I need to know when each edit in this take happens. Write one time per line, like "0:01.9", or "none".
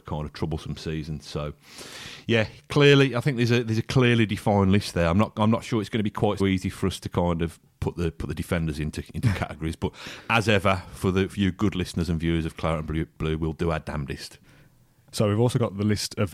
0:06.4